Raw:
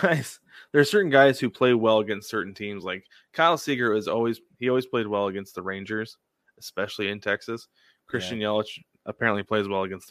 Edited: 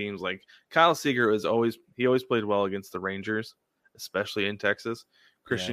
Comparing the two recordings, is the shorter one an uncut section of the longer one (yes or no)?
yes